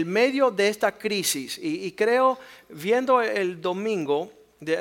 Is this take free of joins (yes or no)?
yes